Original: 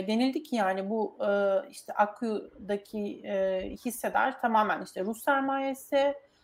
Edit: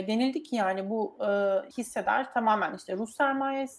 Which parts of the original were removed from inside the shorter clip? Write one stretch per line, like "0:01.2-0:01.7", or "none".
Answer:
0:01.7-0:03.8